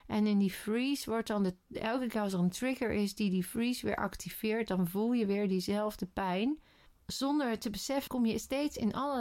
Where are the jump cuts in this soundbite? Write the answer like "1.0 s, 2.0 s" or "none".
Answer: 6.9 s, 8.1 s